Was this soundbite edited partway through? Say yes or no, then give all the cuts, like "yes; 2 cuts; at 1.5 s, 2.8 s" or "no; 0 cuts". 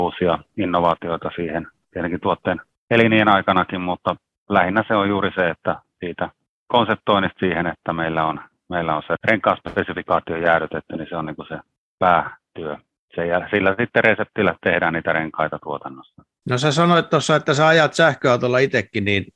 no; 0 cuts